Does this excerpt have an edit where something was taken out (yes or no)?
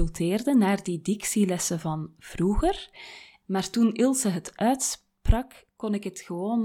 yes